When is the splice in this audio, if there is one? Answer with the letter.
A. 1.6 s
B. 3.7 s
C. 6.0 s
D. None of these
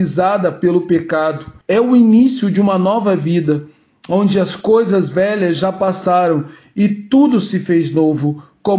A